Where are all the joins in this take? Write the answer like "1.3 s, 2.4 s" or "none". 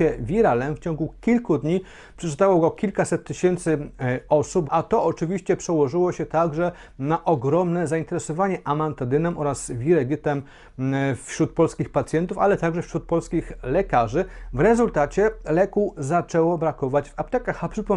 4.6 s